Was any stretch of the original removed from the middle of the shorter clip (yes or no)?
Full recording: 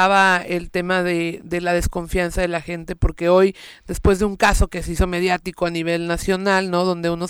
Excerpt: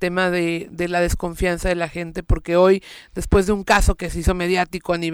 no